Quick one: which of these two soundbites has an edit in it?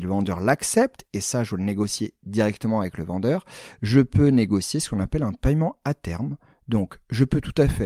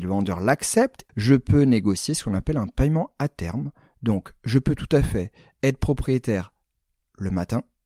second; 1 cut; at 1.1 s

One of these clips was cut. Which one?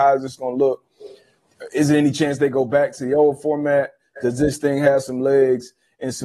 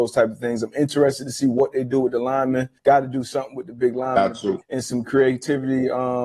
second; 2 cuts; at 2.8 s, 4.6 s

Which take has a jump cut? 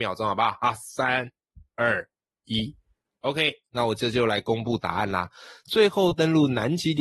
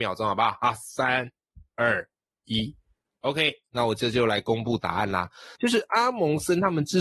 second; 1 cut; at 5.6 s

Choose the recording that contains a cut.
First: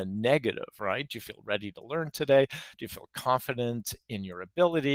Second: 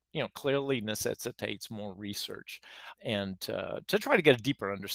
second; 1 cut; at 3.0 s

